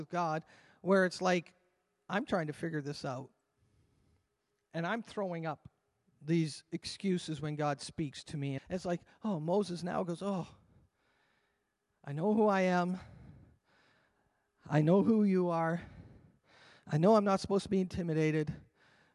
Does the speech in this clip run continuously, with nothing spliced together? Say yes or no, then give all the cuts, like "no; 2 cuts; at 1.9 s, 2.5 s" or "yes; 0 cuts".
no; 1 cut; at 8.6 s